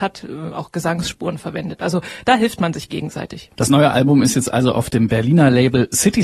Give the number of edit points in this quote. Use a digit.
0